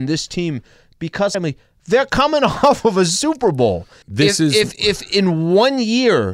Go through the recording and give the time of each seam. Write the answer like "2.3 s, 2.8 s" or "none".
1.3 s, 4.0 s